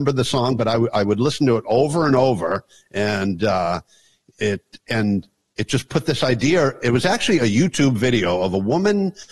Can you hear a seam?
no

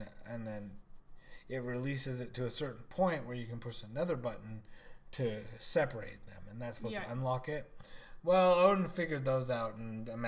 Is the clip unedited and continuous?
yes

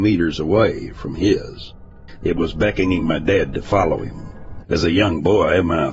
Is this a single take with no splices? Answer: no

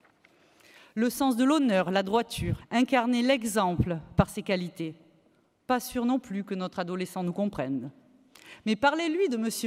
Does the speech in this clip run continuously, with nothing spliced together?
no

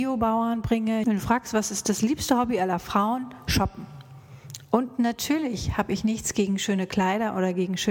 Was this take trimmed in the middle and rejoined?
yes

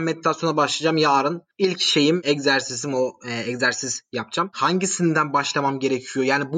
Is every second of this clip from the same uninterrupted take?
yes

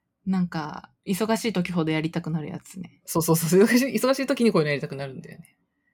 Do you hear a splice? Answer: yes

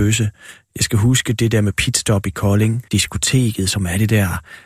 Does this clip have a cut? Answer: yes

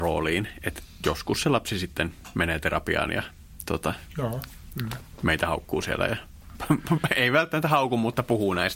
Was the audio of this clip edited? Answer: no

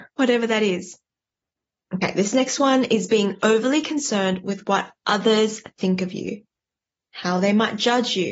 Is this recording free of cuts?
no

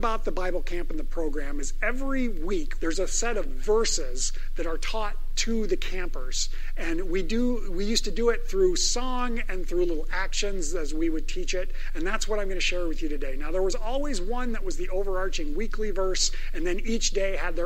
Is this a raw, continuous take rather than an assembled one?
no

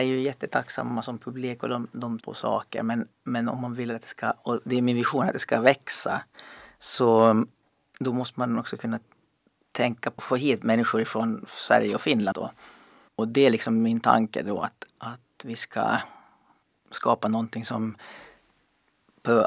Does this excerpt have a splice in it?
yes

